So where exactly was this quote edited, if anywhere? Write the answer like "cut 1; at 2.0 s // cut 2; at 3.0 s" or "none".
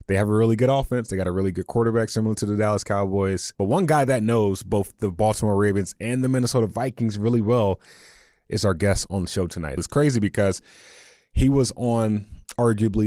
cut 1; at 3.5 s // cut 2; at 9.8 s